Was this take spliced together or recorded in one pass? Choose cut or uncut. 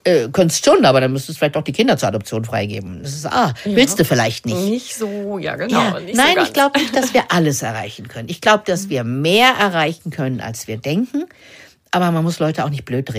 uncut